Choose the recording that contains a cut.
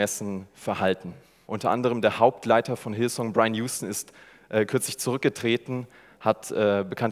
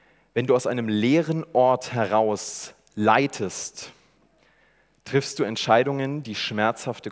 first; 1 cut; at 1.5 s

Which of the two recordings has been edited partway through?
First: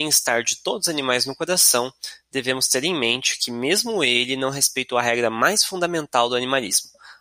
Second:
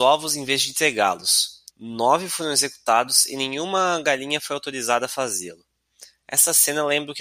second; 1 cut; at 1.7 s

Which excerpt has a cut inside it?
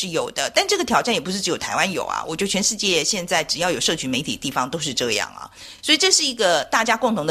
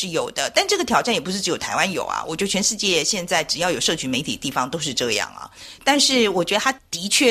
second; 1 cut; at 5.8 s

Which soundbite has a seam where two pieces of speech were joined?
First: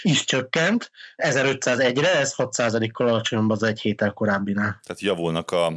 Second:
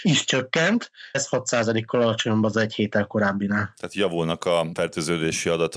second; 1 cut; at 1.1 s

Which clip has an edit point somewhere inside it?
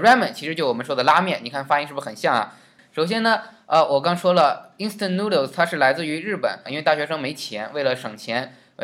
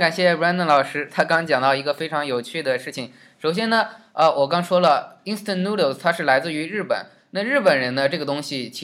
first; 2 cuts; at 2.8 s, 6.7 s

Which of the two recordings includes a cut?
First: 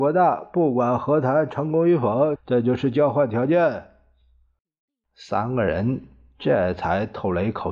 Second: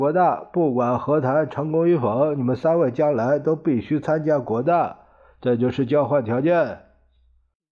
first; 1 cut; at 2.4 s

